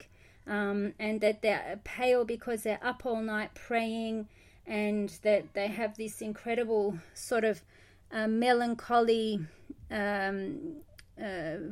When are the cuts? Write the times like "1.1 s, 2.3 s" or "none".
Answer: none